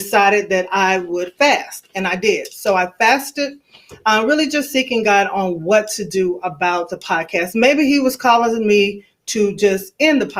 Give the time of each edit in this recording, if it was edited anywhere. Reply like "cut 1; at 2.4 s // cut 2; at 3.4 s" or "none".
none